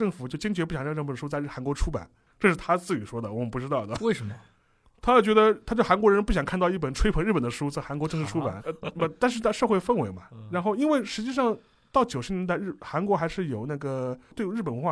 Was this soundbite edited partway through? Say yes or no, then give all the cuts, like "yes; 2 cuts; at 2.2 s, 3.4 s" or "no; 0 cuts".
yes; 1 cut; at 8.6 s